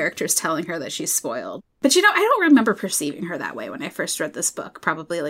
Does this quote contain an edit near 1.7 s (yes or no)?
no